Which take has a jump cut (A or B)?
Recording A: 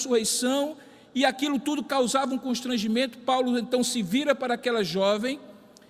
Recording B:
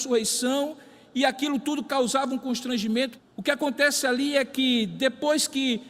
B